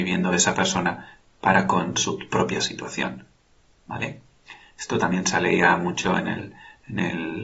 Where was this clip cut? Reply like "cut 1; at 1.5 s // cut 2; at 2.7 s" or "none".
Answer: none